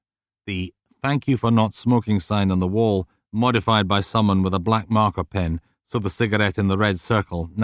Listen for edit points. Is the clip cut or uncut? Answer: uncut